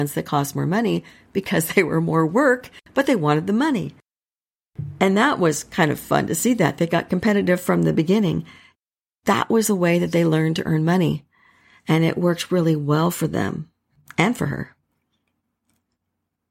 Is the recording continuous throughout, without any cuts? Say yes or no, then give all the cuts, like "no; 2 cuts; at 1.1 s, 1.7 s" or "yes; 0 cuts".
yes; 0 cuts